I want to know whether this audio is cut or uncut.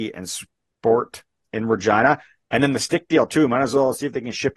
cut